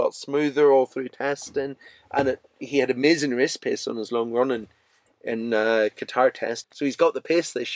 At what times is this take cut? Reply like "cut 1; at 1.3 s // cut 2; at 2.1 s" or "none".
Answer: cut 1; at 6.6 s

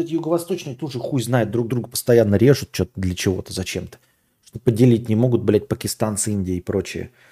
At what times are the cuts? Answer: none

